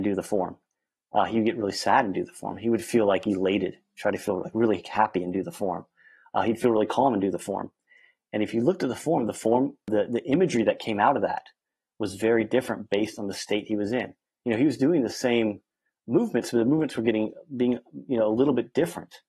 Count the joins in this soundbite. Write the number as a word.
zero